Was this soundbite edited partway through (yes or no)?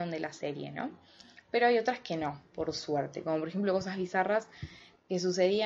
no